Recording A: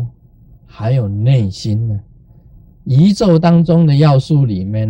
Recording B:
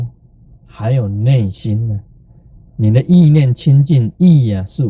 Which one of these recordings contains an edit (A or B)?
A